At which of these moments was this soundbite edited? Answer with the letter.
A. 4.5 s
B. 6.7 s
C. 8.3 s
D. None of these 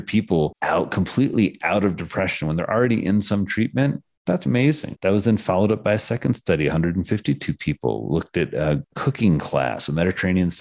A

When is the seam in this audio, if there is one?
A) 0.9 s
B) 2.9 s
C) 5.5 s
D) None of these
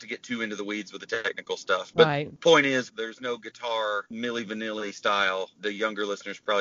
B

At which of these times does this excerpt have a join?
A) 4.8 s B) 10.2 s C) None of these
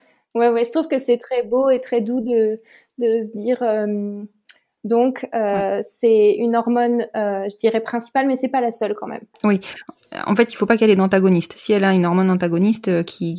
A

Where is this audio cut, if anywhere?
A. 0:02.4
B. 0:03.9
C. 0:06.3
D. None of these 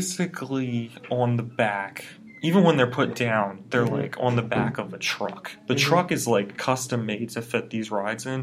D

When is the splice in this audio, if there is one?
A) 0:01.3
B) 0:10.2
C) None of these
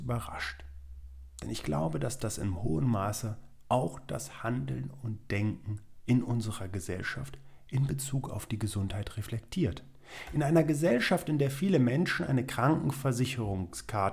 C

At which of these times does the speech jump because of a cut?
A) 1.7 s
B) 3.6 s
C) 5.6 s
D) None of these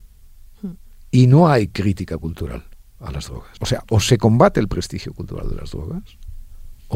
B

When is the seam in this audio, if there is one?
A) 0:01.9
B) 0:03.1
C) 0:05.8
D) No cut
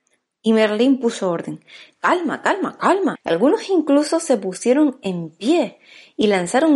B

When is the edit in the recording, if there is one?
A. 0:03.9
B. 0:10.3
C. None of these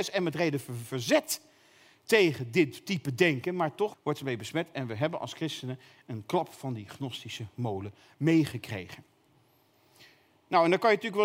A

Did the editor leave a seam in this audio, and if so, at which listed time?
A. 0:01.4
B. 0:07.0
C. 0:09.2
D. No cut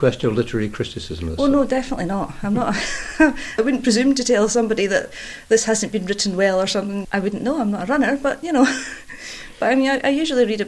B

